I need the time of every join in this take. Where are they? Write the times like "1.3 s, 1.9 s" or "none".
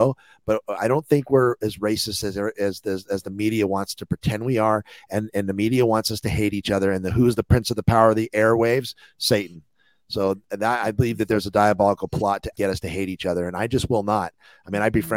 12.5 s

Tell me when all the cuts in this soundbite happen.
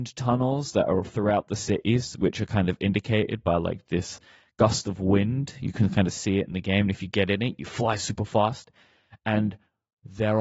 none

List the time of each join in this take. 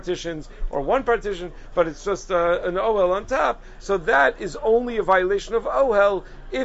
none

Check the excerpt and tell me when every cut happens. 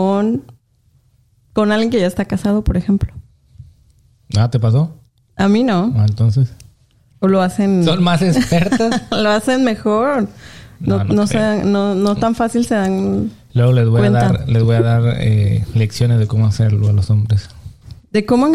7.1 s

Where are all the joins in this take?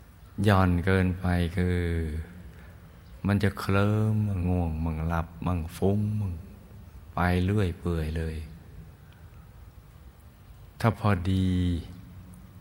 4.4 s

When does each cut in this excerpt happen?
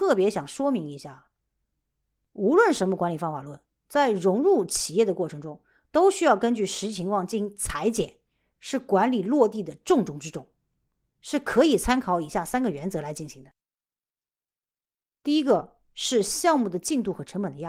8.6 s, 11.2 s

